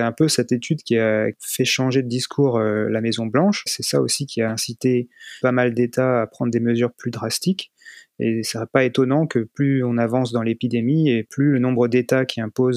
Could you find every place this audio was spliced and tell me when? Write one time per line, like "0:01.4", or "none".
0:05.4